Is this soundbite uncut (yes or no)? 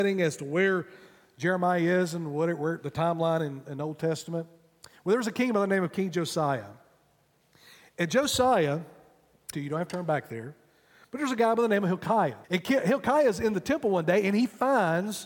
no